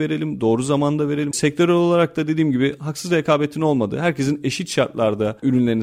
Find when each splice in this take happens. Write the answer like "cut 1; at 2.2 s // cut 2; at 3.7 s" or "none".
cut 1; at 1.3 s